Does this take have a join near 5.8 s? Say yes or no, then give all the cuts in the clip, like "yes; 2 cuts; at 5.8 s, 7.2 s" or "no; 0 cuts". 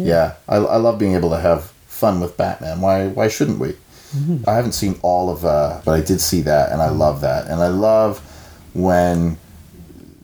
yes; 2 cuts; at 4.4 s, 5.8 s